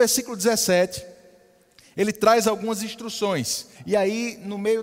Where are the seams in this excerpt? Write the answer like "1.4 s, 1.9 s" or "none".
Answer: 3.8 s